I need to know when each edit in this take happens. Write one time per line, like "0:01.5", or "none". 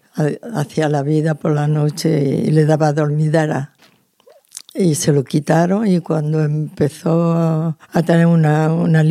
0:07.8